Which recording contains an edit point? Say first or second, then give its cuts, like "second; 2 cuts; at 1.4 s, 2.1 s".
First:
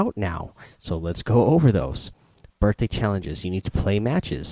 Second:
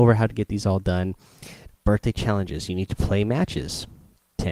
second; 1 cut; at 1.7 s